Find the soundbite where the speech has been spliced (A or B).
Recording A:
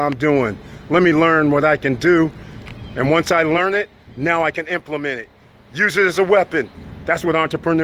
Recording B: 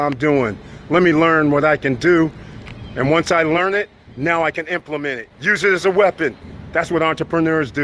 B